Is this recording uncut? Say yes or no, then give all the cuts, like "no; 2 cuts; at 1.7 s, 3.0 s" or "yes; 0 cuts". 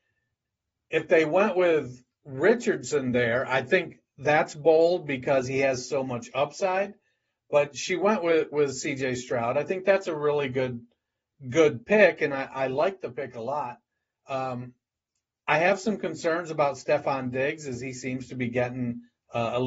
yes; 0 cuts